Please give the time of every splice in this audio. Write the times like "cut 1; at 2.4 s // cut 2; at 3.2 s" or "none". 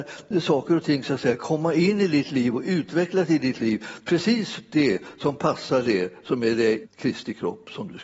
cut 1; at 6.8 s